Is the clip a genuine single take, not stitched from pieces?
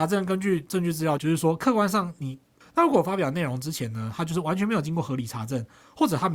no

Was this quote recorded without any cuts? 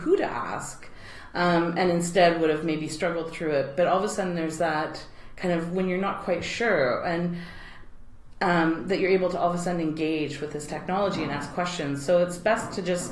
yes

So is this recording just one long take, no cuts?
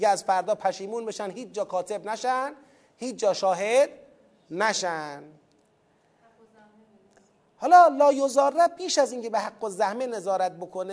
yes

